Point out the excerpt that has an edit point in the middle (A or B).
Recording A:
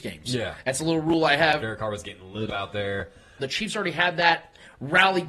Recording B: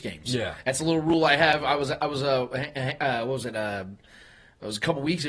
A